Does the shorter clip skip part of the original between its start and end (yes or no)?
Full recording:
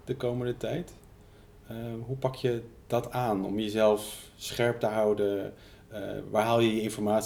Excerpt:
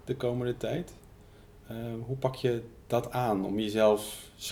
no